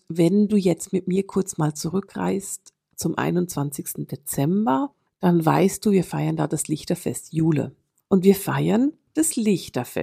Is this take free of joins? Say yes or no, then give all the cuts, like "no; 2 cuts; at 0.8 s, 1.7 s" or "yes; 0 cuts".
yes; 0 cuts